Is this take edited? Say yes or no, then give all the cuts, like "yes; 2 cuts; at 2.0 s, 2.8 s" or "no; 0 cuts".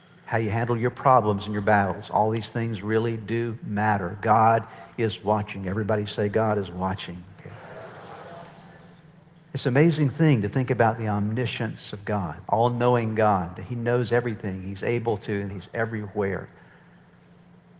yes; 2 cuts; at 12.4 s, 15.5 s